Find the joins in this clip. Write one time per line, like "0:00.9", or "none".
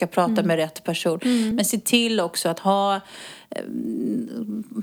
none